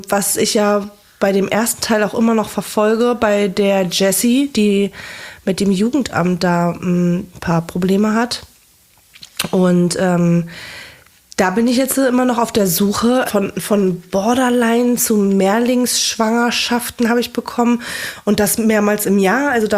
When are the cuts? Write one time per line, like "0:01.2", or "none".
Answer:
0:13.3